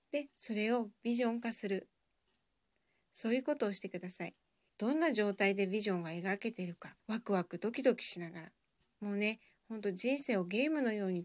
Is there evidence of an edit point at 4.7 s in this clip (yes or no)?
yes